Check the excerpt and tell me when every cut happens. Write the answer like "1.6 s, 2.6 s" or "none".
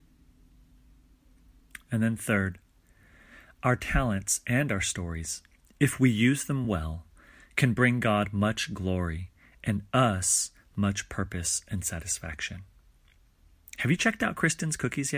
none